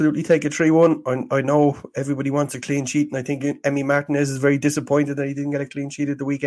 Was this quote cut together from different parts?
no; 0 cuts

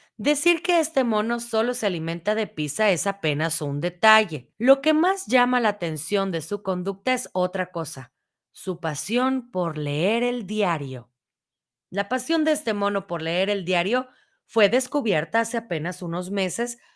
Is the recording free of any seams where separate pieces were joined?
no; 1 cut; at 4.5 s

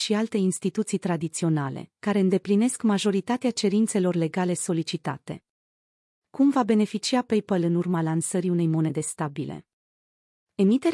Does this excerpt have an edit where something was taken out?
no; 0 cuts

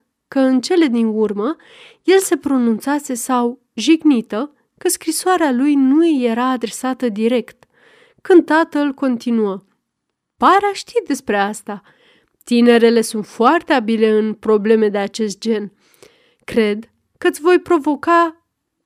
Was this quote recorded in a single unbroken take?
yes; 0 cuts

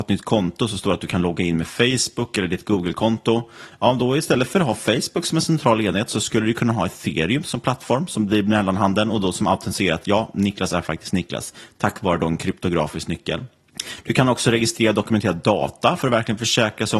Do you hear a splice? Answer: no; 0 cuts

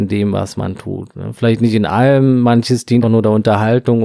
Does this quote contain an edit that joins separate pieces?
yes; 1 cut; at 3.0 s

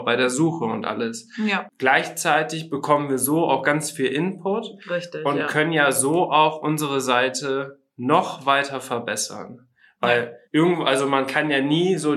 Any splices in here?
yes; 2 cuts; at 1.7 s, 10.4 s

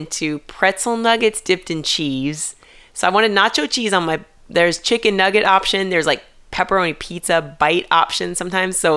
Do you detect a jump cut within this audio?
no; 0 cuts

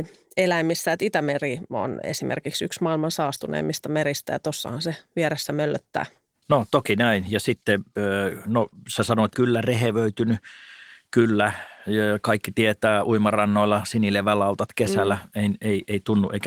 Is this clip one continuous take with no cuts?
no; 1 cut; at 9.3 s

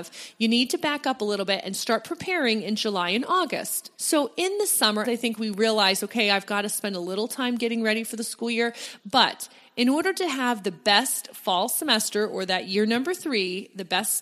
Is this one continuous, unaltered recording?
no; 3 cuts; at 3.9 s, 5.0 s, 9.0 s

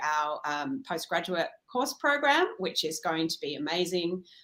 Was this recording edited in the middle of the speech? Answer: no; 0 cuts

